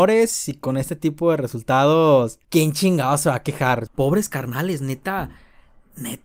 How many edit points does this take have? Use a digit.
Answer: 2